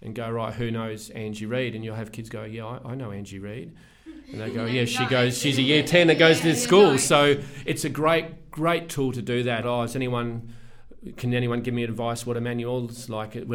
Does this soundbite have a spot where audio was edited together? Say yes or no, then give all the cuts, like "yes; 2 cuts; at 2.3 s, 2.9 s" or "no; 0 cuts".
yes; 1 cut; at 9.6 s